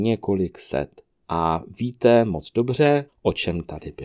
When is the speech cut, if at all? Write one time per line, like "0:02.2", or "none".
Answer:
0:01.2
0:03.1